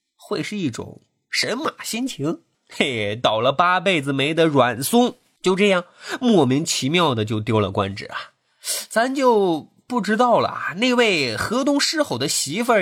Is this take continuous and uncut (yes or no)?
no